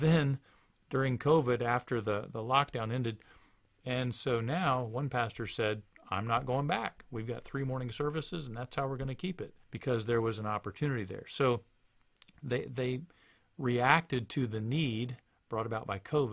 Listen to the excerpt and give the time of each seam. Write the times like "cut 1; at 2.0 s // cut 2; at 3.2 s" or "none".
cut 1; at 3.7 s // cut 2; at 9.6 s